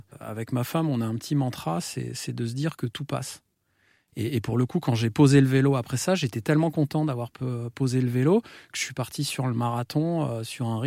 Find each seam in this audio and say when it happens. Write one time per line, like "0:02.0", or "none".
0:04.1